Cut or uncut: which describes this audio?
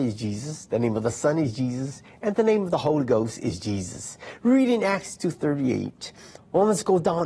cut